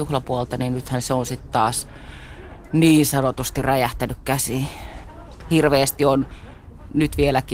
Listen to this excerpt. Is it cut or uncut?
uncut